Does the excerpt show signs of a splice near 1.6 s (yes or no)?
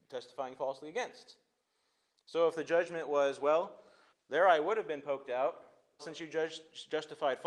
no